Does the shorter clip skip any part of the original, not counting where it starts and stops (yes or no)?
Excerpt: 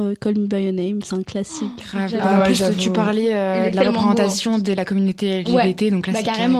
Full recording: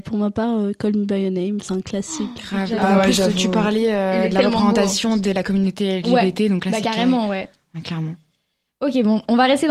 no